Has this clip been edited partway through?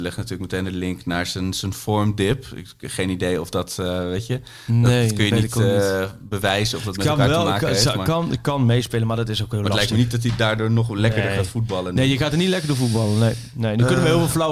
no; 0 cuts

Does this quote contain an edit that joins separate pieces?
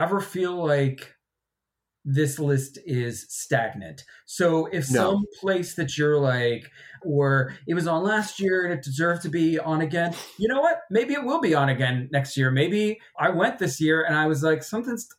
yes; 2 cuts; at 7.0 s, 13.1 s

